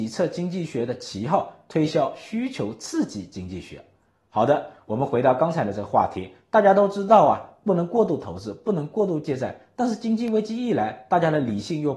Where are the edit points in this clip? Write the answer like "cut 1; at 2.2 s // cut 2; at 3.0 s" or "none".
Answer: none